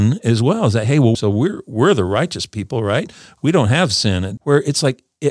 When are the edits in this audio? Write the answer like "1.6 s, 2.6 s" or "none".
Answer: 1.1 s, 4.4 s